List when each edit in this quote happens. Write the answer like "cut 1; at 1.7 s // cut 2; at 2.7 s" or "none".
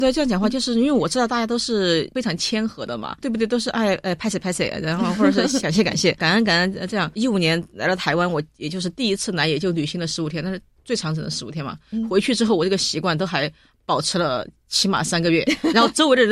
none